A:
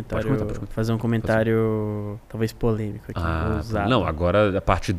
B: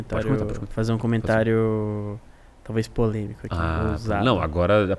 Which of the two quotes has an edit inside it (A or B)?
A